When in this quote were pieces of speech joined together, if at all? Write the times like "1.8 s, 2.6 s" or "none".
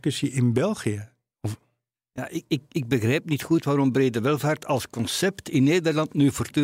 none